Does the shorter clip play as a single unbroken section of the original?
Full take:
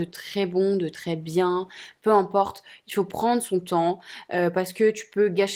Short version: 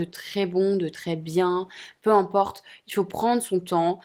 yes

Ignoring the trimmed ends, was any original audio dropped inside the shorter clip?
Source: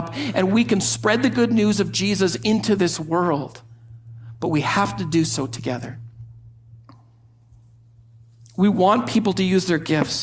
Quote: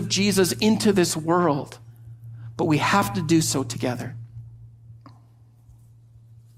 no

